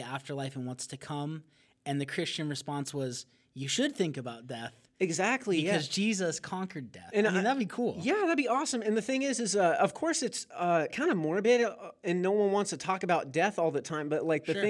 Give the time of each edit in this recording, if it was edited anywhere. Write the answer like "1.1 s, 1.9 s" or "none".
none